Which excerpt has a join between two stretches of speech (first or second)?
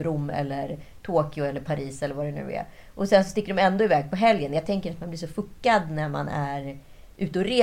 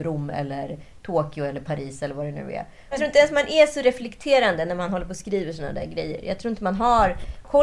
second